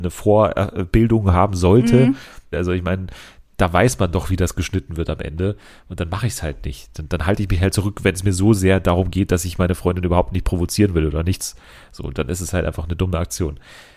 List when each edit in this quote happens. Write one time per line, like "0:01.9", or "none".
0:02.5

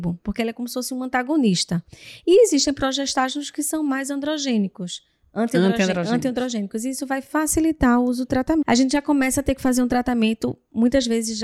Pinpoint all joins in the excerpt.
0:08.6

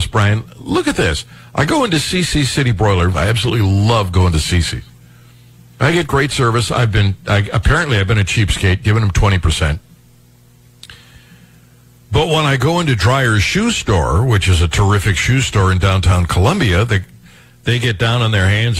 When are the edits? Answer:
0:03.1

